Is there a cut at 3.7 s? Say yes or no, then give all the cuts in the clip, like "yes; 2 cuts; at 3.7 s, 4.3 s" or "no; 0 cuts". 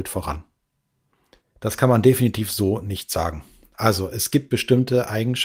no; 1 cut; at 1.4 s